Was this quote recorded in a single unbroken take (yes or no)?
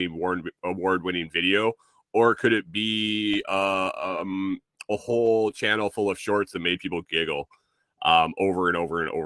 yes